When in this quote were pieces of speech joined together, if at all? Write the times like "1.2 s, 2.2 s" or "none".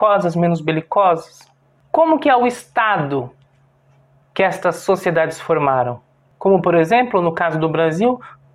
4.2 s